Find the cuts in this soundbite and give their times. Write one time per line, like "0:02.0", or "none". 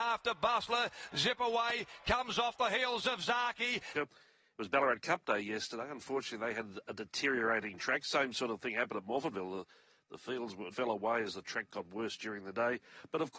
0:03.9
0:10.7